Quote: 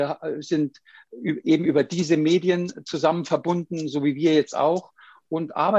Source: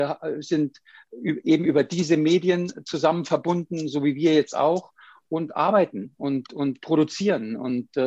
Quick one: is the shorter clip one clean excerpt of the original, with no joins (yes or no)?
yes